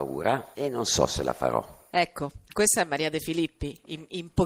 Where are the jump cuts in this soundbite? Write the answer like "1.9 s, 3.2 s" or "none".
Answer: 1.9 s